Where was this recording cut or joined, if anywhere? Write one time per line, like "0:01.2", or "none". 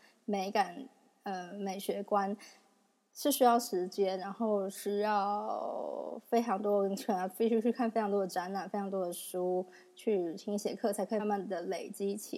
0:11.2